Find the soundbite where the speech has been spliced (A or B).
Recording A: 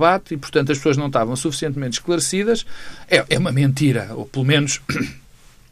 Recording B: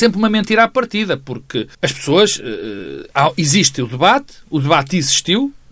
B